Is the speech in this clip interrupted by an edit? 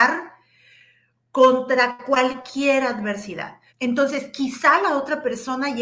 yes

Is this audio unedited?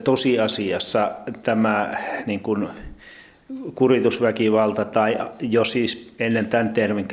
yes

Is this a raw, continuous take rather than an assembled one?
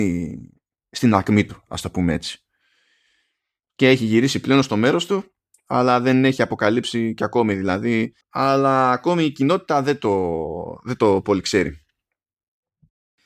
no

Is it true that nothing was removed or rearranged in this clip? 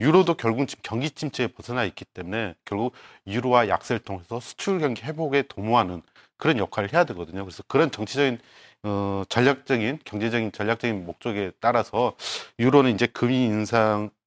yes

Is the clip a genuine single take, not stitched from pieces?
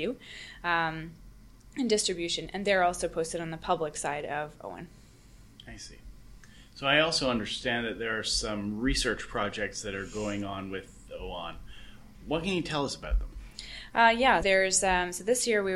no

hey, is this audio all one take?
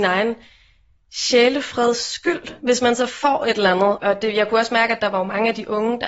no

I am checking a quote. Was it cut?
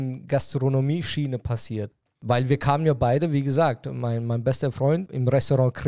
no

